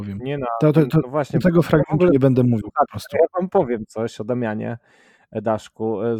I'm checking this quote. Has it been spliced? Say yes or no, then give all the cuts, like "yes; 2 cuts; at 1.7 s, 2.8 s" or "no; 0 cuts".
no; 0 cuts